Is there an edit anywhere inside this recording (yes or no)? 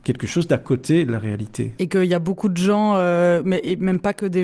yes